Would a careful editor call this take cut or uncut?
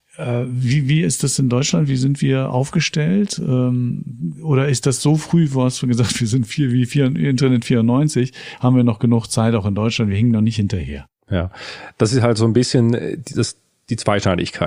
uncut